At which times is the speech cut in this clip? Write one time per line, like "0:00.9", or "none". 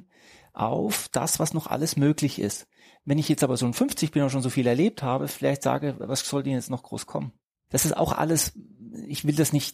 0:07.7